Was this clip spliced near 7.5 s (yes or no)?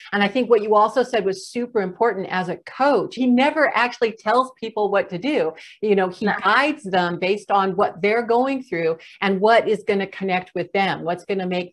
no